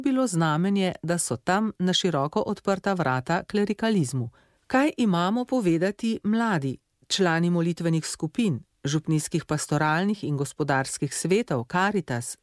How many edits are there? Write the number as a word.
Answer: one